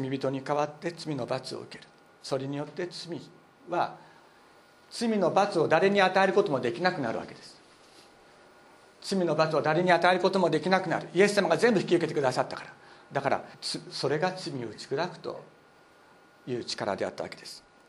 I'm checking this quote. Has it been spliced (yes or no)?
yes